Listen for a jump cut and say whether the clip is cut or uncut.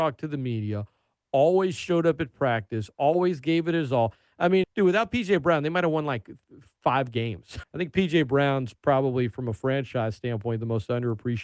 cut